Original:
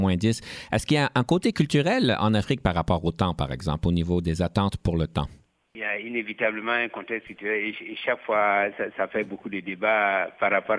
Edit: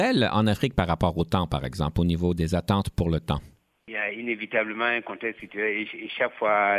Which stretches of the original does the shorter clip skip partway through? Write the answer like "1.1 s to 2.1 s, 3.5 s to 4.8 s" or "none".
none